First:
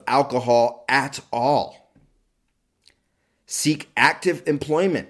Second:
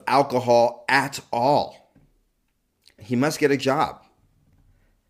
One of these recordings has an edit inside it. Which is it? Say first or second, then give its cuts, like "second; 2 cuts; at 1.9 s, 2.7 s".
second; 1 cut; at 3.0 s